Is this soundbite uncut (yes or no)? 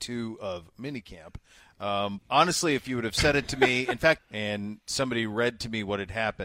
no